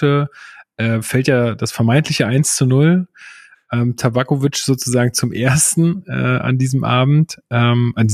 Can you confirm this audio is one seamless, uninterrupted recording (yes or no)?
yes